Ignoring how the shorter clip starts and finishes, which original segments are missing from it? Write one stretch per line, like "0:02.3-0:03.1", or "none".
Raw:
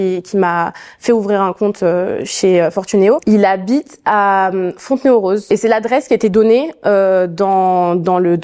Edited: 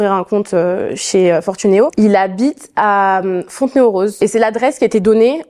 none